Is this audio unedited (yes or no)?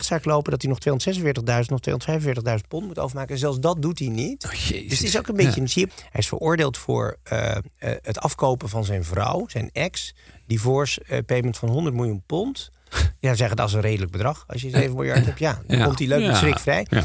no